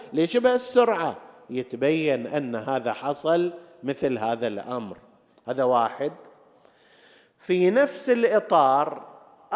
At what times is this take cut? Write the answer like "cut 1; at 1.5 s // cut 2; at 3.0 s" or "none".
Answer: none